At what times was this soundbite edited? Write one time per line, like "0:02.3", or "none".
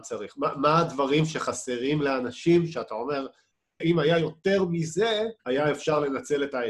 0:03.8
0:05.4